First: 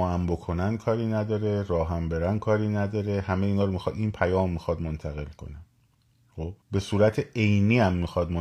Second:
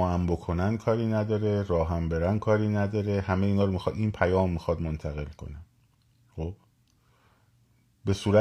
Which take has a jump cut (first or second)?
first